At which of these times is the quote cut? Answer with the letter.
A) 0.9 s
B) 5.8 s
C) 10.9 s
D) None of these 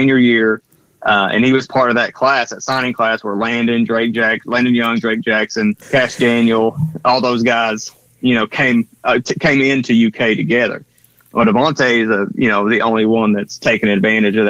B